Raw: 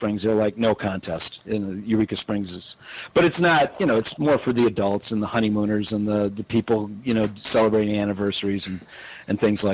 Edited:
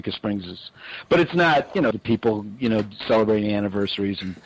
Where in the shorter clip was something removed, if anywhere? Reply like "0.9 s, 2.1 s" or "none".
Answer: 1.9 s